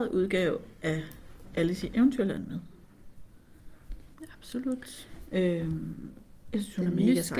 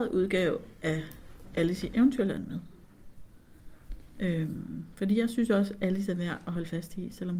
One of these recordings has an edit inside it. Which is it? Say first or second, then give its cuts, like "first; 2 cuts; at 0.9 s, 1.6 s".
first; 1 cut; at 4.1 s